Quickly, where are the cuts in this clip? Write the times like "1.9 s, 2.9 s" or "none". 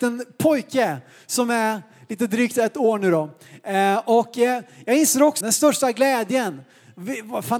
5.4 s